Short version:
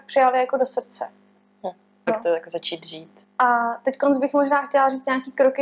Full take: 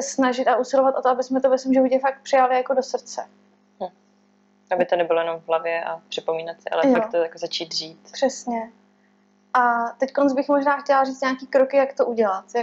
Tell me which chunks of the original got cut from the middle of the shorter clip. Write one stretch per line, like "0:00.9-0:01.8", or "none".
0:04.2-0:07.0
0:08.1-0:09.4